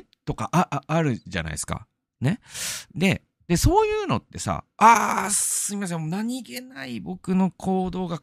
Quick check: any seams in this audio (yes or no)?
yes